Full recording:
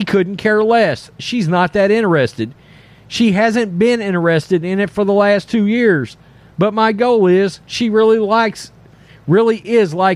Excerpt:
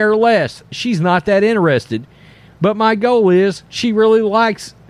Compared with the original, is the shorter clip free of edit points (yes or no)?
no